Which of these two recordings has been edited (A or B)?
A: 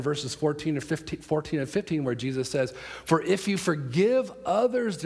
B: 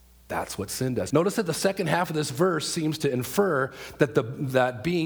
B